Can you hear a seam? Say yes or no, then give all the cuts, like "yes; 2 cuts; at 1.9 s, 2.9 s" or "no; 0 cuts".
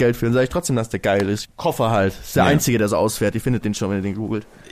yes; 1 cut; at 1.4 s